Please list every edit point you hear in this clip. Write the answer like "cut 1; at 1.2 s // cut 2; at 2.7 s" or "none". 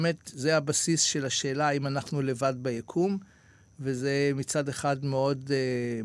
none